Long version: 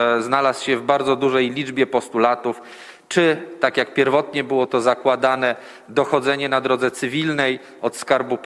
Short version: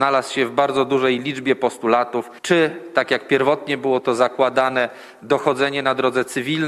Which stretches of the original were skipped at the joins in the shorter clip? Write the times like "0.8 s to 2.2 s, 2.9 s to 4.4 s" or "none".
2.7 s to 3.0 s